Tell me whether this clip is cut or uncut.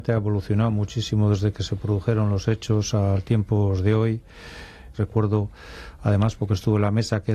cut